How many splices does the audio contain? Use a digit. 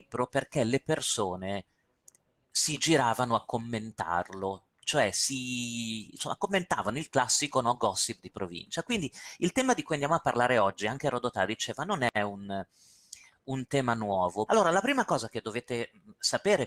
1